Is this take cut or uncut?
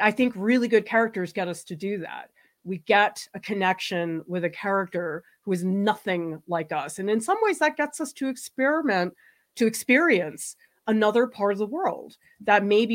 uncut